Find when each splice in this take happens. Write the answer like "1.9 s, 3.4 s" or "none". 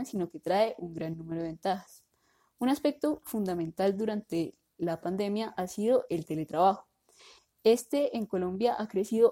none